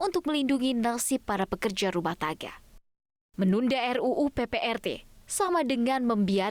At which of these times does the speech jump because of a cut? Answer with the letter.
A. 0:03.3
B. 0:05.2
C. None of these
B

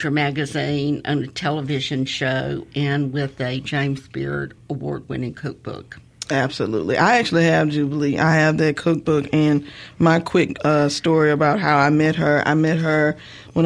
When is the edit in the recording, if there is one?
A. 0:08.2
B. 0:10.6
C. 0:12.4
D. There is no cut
D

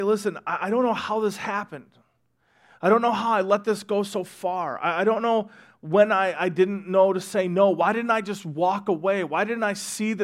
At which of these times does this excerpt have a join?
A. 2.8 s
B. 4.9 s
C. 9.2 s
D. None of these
D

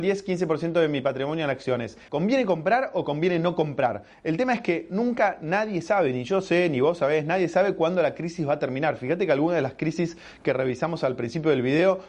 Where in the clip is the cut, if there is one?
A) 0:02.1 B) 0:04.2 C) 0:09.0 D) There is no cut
A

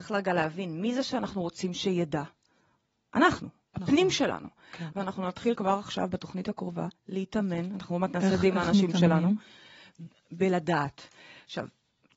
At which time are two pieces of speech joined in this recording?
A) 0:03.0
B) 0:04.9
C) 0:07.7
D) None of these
B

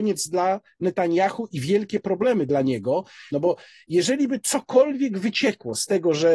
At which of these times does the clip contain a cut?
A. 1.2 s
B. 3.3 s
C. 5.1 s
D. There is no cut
B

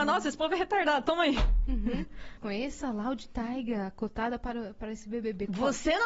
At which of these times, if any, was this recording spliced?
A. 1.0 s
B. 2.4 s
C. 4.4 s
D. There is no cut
B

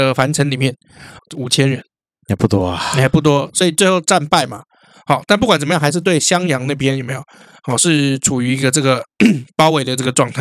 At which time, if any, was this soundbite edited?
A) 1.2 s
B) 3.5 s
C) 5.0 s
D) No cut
A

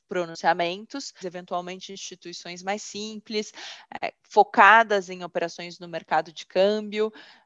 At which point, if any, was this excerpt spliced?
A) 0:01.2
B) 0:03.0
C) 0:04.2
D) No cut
A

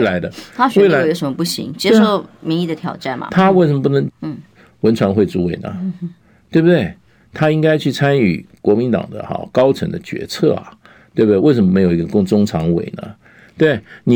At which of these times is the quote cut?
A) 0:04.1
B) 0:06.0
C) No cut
A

